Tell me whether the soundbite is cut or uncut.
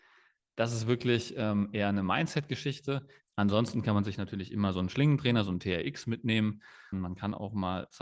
cut